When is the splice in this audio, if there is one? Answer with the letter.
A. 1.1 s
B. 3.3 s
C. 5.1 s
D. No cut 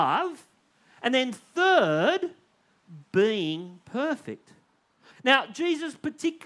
C